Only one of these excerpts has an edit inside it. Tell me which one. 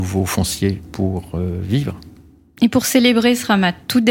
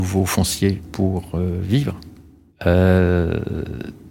second; 1 cut; at 2.5 s

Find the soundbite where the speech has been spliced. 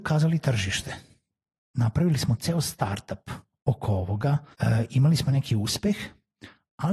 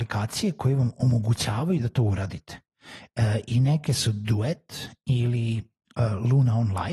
first; 2 cuts; at 1.6 s, 4.5 s

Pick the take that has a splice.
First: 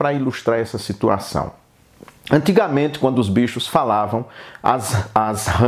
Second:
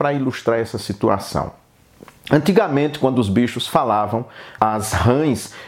second; 1 cut; at 4.6 s

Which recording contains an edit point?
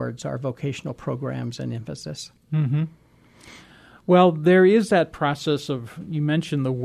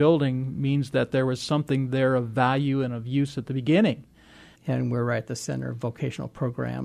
second; 1 cut; at 4.5 s

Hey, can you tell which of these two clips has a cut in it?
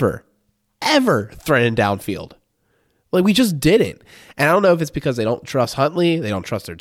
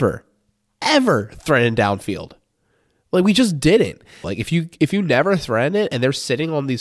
second; 1 cut; at 4.2 s

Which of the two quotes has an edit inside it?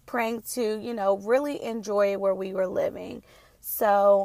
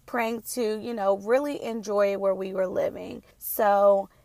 second; 1 cut; at 3.3 s

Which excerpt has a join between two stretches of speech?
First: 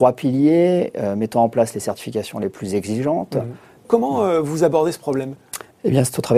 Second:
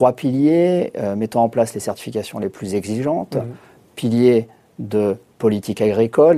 first; 1 cut; at 3.8 s

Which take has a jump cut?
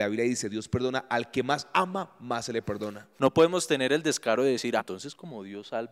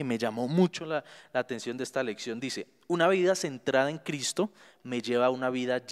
first; 2 cuts; at 3.2 s, 4.8 s

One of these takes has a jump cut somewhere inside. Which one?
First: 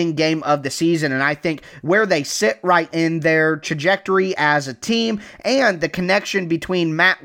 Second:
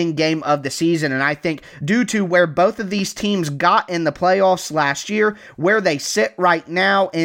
first; 2 cuts; at 1.8 s, 2.9 s

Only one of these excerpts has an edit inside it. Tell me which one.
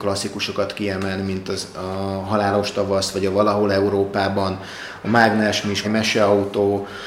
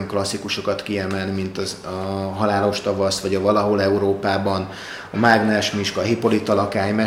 first; 1 cut; at 5.8 s

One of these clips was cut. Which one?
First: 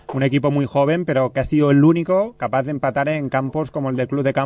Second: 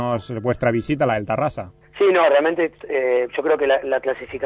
second; 1 cut; at 1.8 s

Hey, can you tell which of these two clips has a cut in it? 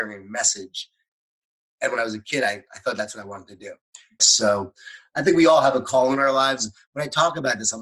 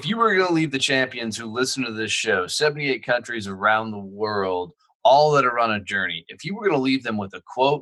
first; 1 cut; at 4.2 s

